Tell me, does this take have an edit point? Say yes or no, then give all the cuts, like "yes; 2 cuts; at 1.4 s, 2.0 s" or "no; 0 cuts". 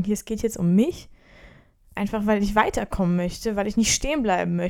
no; 0 cuts